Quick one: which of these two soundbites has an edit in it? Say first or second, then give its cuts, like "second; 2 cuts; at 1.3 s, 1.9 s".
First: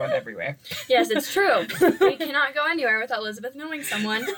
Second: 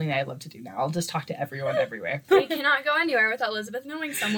second; 1 cut; at 2.3 s